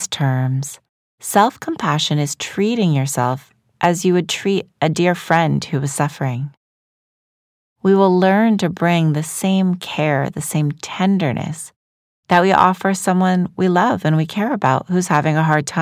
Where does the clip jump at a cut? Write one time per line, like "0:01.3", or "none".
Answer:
0:10.3